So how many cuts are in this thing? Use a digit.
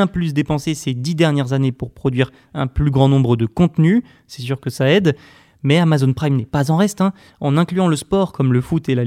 0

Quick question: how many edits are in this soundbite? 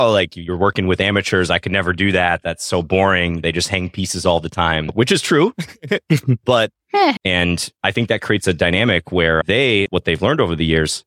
2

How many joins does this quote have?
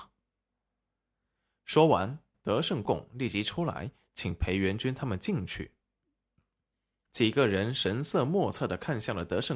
1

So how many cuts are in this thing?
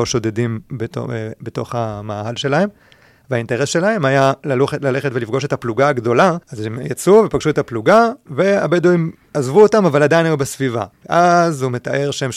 2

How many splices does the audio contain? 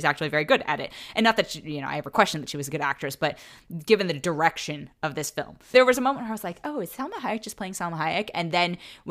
1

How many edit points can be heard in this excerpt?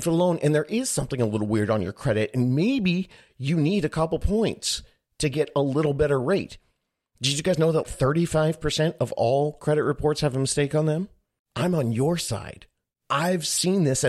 2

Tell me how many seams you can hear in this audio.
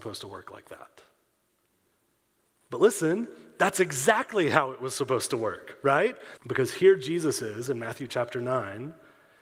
1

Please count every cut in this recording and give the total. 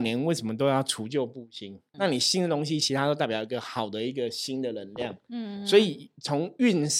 1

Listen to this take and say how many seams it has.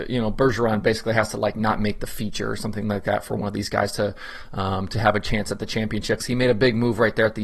1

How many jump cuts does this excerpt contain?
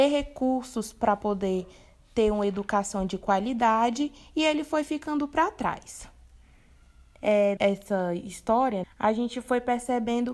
2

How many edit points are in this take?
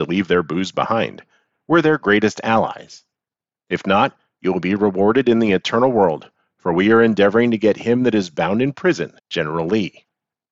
2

